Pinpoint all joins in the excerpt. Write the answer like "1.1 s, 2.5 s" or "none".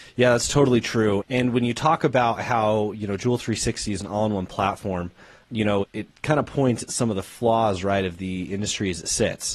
none